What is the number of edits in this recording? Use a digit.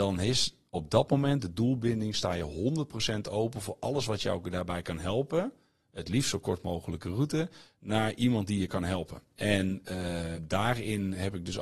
2